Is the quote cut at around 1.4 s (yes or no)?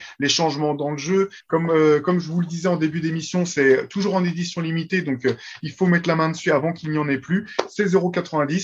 yes